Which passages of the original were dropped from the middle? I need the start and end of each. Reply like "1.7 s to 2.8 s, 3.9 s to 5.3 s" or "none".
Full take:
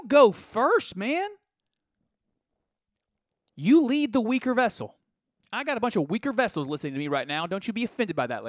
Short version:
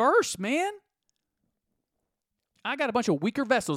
3.1 s to 5.4 s